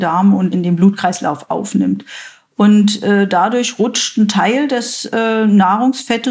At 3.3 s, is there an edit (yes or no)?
no